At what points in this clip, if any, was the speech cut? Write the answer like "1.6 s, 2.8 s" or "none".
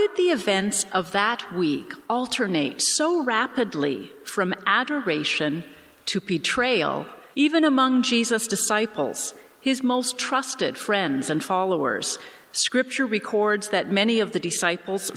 7.3 s

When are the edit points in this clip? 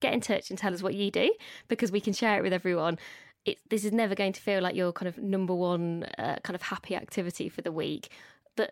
none

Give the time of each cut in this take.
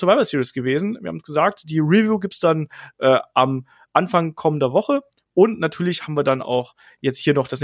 none

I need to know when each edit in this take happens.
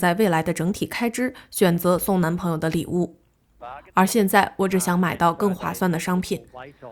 3.6 s

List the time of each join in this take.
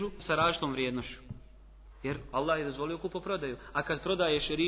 none

